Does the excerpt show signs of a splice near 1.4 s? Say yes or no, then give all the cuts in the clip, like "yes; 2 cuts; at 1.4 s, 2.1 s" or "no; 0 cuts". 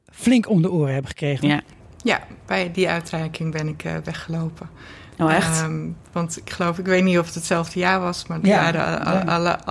yes; 1 cut; at 1.4 s